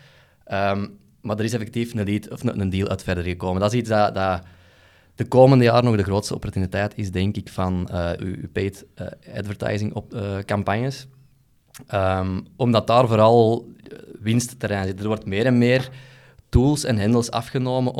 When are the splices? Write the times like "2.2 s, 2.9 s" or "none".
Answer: 8.2 s